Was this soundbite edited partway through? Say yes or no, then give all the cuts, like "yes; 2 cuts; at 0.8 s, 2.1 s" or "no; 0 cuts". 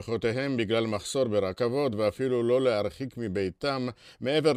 no; 0 cuts